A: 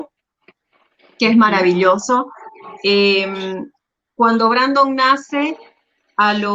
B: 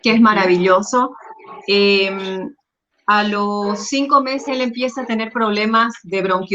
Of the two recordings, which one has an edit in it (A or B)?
B